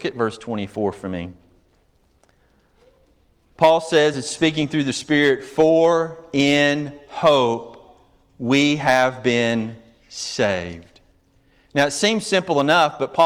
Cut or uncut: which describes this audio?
uncut